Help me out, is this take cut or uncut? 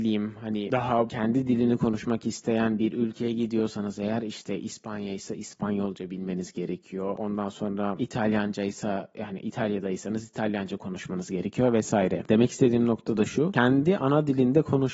uncut